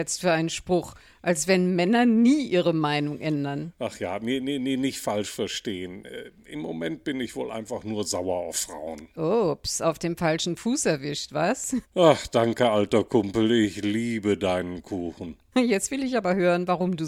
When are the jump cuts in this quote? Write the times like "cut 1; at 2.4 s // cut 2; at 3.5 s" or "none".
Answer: cut 1; at 11.8 s // cut 2; at 15.5 s